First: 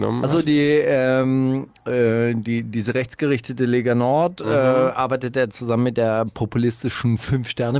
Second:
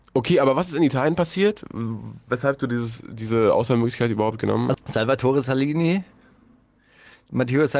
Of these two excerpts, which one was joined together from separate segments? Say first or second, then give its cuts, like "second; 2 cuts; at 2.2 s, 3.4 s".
second; 1 cut; at 4.7 s